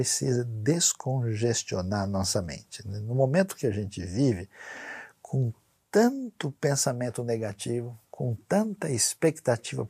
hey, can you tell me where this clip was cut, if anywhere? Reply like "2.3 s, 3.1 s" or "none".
none